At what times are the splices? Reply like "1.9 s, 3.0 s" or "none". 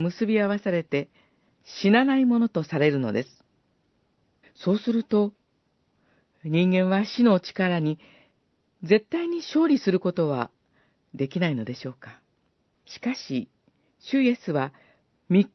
1.5 s, 4.4 s, 12.7 s